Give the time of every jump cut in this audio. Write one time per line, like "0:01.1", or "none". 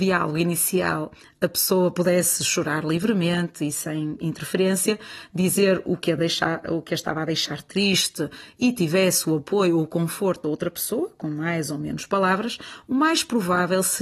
none